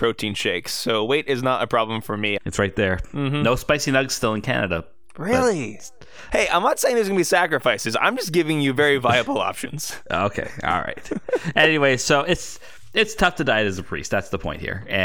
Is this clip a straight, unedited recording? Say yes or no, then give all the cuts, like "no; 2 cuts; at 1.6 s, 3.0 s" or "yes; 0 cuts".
no; 2 cuts; at 2.4 s, 6.3 s